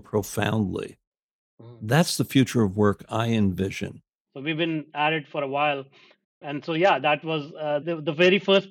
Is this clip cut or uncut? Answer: cut